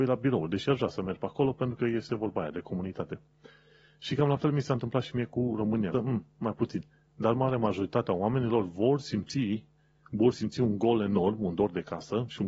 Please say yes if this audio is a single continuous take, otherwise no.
no